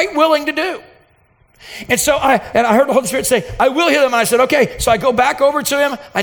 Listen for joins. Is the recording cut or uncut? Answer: cut